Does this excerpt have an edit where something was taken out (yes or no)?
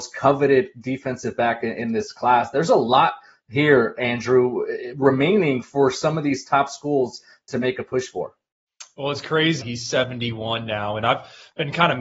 yes